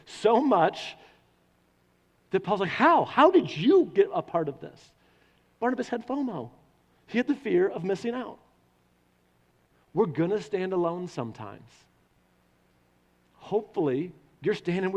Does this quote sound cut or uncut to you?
uncut